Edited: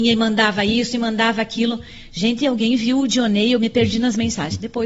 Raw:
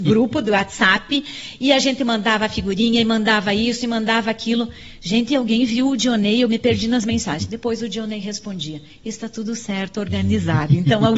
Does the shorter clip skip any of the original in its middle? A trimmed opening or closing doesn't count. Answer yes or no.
no